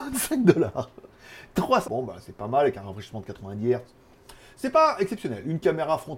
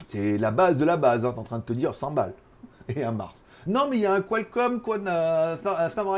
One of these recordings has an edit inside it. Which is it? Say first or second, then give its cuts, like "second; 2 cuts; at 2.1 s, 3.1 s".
first; 1 cut; at 1.8 s